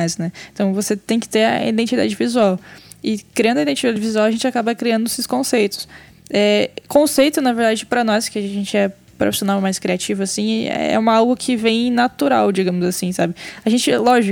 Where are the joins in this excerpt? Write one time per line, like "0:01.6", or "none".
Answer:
none